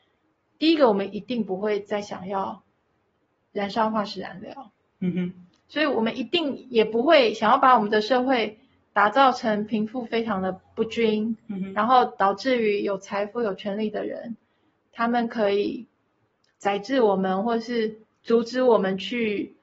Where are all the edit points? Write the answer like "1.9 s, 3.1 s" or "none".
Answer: none

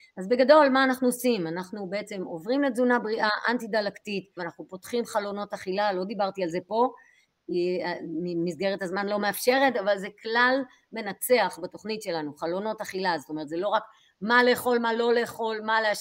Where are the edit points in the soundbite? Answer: 4.4 s

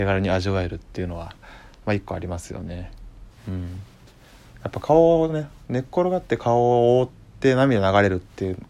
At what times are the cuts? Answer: 3.3 s

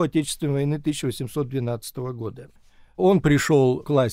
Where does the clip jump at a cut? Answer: none

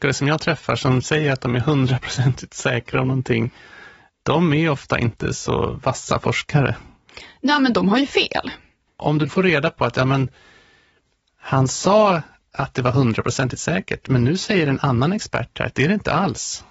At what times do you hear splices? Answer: 8.9 s

